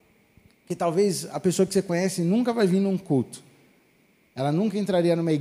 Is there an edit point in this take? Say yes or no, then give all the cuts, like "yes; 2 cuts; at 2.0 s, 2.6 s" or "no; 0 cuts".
no; 0 cuts